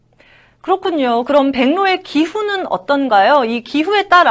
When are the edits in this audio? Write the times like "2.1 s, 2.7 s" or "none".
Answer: none